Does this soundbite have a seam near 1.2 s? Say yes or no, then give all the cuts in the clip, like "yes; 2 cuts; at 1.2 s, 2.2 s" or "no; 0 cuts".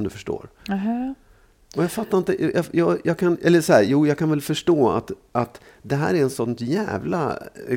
no; 0 cuts